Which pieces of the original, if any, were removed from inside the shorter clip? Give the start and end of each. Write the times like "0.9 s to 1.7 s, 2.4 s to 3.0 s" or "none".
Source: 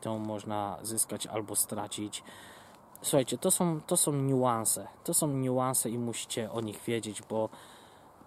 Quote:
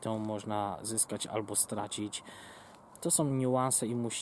3.0 s to 5.0 s